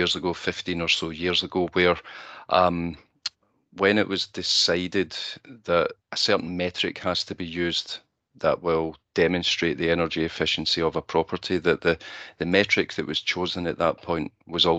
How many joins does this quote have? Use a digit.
1